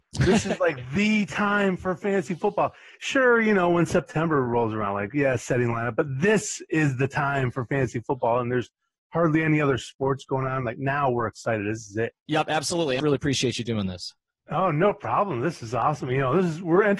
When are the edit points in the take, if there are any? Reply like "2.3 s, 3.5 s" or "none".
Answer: 13.0 s